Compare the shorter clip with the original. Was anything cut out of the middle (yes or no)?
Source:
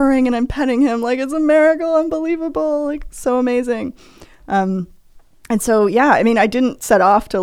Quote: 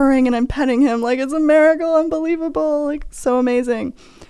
no